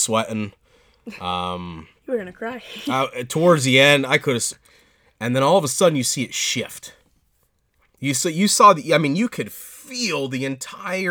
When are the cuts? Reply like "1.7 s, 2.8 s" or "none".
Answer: 4.5 s

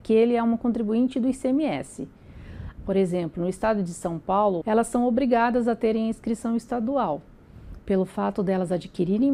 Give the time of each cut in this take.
2.8 s, 4.6 s

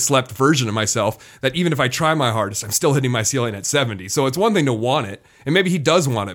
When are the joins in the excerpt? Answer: none

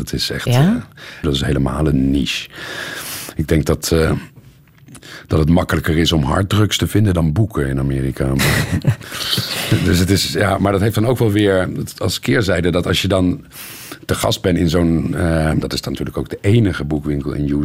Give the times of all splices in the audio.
1.2 s, 15.6 s

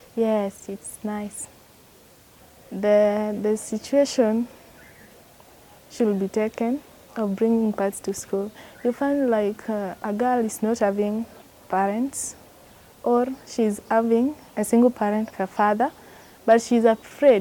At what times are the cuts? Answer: 15.3 s

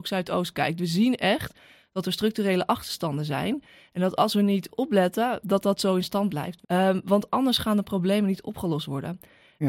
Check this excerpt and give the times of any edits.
6.6 s

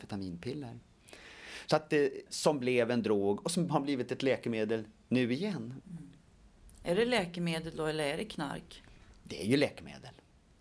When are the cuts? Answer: 2.3 s, 5.8 s

